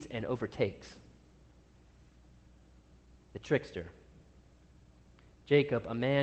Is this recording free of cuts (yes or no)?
yes